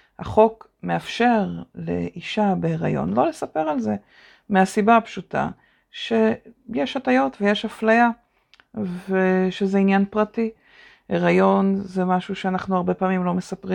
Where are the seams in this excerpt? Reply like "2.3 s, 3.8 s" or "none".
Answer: none